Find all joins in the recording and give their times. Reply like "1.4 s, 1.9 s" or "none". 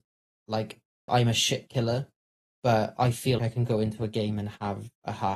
1.1 s, 3.4 s